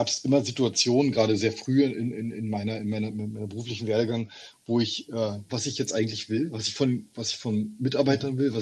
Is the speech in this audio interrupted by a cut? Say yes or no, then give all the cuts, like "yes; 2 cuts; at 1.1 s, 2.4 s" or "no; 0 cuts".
yes; 1 cut; at 5.5 s